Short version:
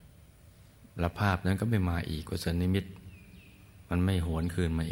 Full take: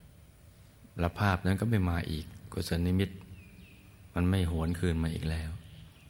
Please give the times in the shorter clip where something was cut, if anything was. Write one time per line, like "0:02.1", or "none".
0:02.2